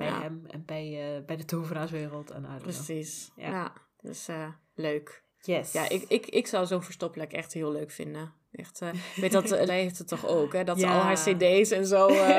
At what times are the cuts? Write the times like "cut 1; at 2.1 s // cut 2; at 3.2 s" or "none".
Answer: cut 1; at 9.7 s